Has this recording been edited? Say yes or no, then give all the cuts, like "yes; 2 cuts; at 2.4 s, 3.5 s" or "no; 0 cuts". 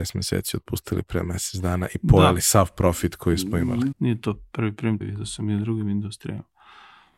yes; 2 cuts; at 3.9 s, 5.0 s